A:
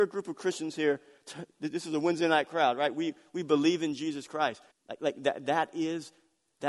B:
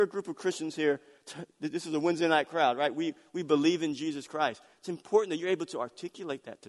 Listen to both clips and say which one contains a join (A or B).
A